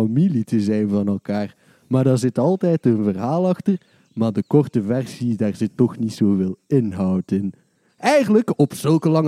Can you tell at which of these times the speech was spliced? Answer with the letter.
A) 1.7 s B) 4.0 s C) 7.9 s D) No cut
C